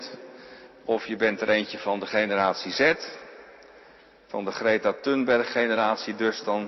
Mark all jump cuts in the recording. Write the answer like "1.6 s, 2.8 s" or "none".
none

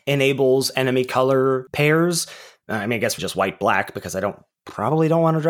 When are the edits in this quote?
3.2 s

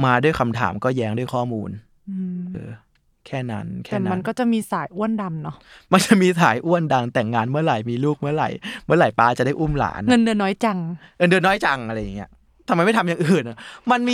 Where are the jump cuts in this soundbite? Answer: 2.5 s

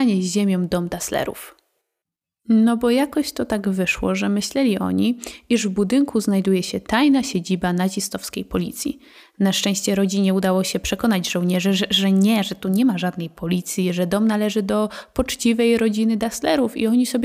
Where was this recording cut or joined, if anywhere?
none

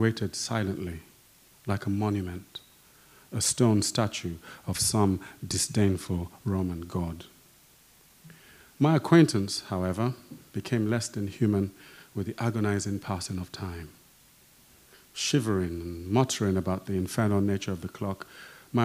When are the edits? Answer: none

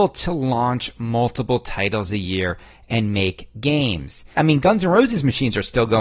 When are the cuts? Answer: 4.3 s

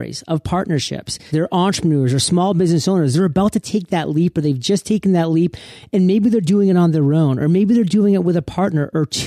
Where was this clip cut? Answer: 1.3 s

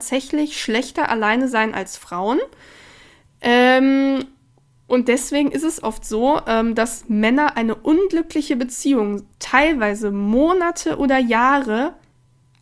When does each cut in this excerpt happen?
none

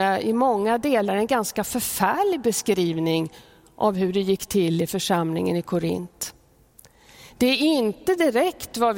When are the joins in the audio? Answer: none

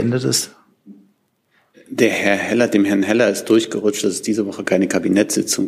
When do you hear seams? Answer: 1.7 s

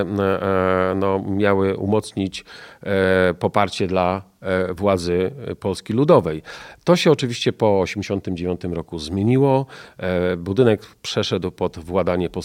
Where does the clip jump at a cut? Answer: none

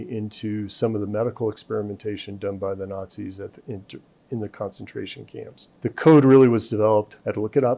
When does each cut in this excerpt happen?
5.8 s

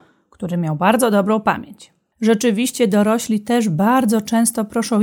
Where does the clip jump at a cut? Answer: 2.1 s

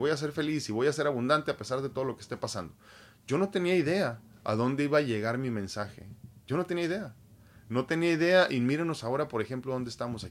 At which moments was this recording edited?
none

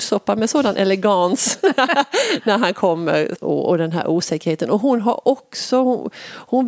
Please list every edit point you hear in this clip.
3.4 s

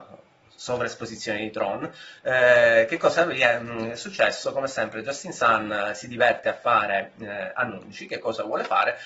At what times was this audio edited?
none

